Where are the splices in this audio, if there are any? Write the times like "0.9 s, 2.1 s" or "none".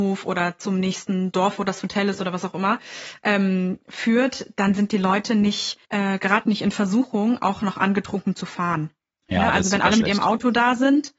5.8 s